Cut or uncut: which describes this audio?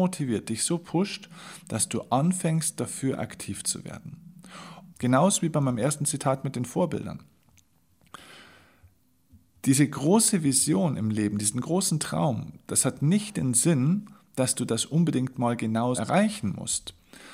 cut